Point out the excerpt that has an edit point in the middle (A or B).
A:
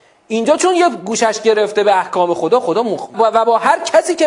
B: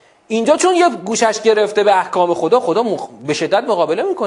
A